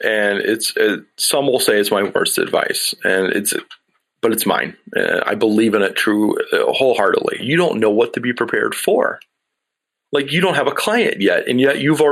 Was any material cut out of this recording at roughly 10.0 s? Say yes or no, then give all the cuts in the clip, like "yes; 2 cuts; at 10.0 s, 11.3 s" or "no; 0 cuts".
no; 1 cut; at 7.4 s